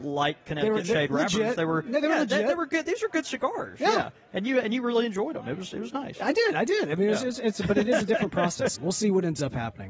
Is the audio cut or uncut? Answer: cut